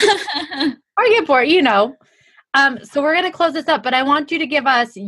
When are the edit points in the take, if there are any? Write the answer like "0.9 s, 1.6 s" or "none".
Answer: none